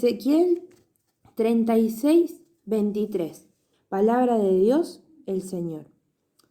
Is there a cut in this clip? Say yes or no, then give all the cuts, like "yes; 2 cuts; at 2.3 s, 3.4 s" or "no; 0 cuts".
yes; 1 cut; at 3.7 s